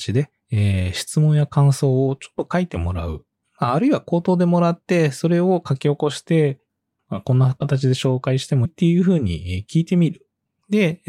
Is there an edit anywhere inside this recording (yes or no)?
yes